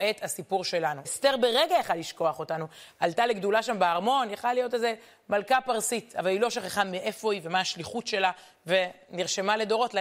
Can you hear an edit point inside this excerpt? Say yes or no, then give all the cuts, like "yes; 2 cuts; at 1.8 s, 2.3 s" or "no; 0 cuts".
yes; 1 cut; at 1.0 s